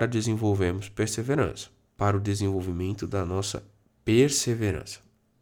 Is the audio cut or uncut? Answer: cut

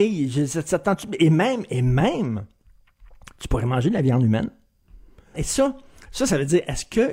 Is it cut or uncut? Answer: cut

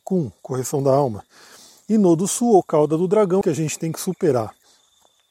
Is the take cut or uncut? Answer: cut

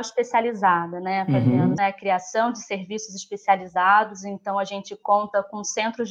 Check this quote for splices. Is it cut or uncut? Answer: cut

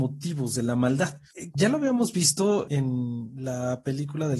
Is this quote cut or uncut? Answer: cut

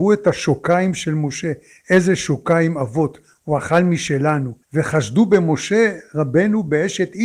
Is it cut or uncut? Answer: cut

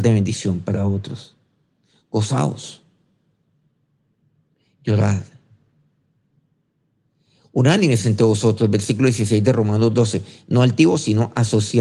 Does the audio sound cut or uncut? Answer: uncut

